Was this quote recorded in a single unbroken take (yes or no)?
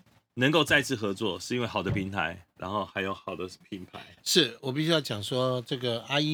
yes